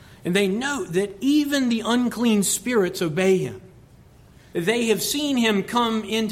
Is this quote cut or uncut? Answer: cut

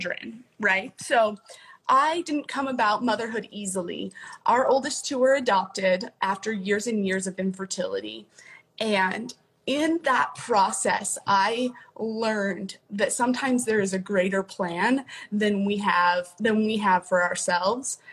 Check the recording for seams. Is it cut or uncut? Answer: uncut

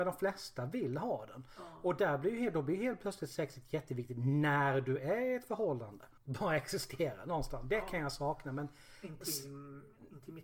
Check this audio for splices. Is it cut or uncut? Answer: cut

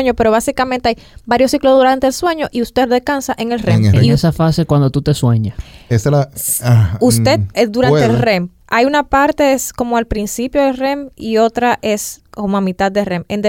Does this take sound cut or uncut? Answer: cut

